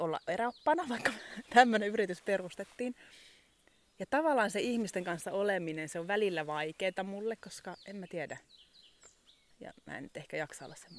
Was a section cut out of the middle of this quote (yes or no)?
yes